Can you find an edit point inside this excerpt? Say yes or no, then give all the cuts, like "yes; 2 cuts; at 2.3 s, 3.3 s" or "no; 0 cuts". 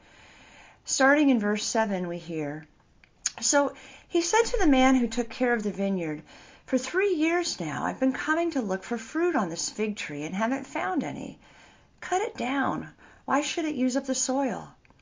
no; 0 cuts